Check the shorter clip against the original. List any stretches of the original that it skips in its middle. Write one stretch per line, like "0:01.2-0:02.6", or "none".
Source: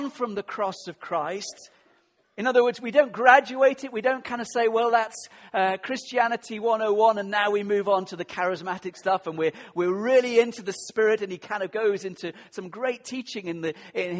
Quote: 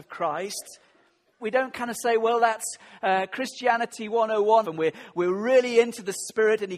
0:02.3-0:03.9
0:07.1-0:09.2